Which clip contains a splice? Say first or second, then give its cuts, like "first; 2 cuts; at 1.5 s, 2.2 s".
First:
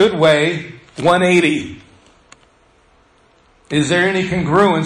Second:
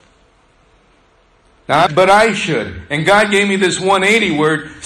second; 1 cut; at 1.9 s